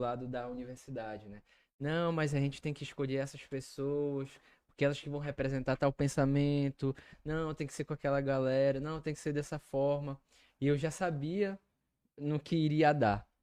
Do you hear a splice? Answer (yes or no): no